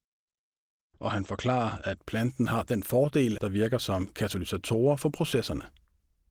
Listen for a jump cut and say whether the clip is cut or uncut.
cut